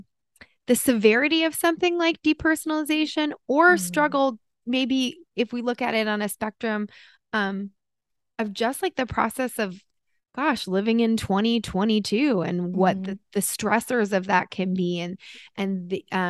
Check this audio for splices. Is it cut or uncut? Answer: uncut